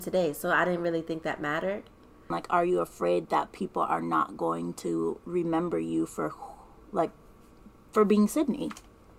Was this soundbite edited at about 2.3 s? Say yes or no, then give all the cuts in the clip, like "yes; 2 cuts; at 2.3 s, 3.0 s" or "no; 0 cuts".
yes; 1 cut; at 2.3 s